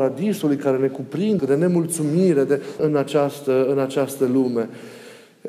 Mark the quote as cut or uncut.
cut